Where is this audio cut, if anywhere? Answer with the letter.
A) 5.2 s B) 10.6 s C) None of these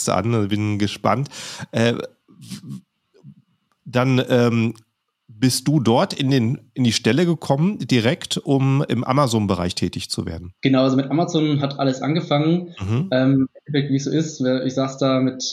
B